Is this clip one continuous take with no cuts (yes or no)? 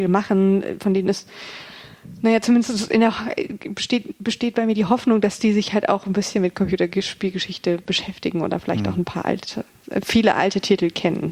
yes